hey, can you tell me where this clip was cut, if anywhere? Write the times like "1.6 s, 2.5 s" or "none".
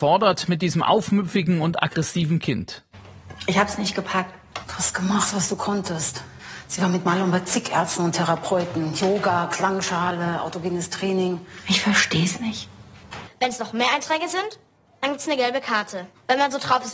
13.3 s